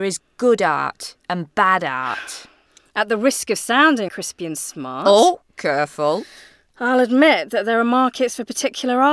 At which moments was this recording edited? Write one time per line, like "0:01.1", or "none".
0:04.1